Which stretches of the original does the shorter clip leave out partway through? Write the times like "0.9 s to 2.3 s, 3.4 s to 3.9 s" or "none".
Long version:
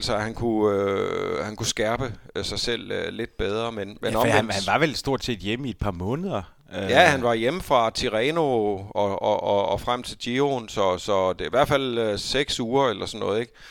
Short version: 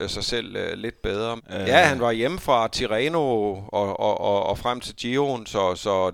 3.7 s to 6.6 s